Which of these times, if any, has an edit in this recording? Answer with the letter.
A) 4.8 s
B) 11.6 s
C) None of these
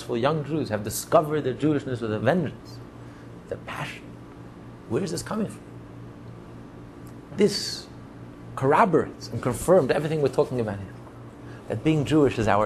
C